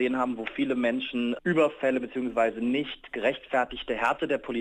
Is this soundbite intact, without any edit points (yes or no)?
yes